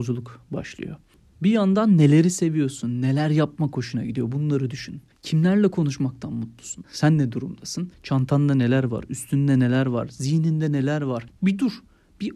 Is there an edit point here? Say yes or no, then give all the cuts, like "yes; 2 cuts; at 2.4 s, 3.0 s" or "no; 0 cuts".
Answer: yes; 2 cuts; at 6.8 s, 11.4 s